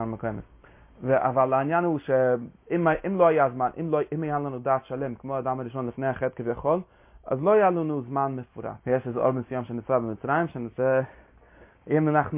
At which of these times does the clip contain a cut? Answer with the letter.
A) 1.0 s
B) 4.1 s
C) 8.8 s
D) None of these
C